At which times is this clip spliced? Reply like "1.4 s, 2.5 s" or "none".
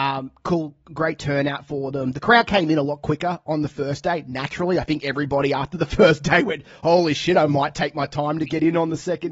none